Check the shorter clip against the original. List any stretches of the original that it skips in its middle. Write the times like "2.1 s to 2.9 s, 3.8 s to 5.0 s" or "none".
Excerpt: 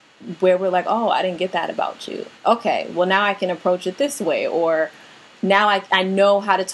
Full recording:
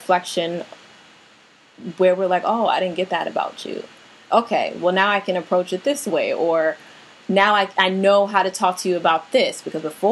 3.9 s to 4.2 s